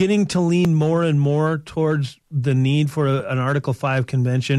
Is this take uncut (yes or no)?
yes